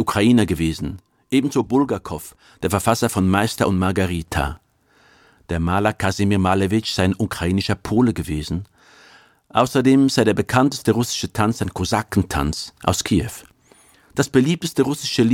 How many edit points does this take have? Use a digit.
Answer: 0